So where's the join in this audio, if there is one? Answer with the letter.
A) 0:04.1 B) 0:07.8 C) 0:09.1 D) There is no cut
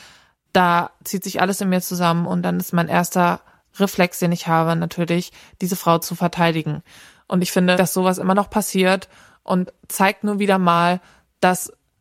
B